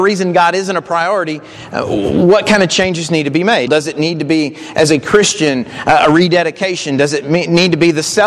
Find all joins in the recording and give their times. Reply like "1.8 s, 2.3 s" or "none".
3.7 s